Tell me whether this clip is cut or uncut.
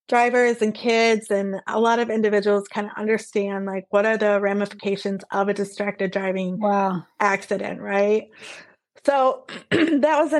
uncut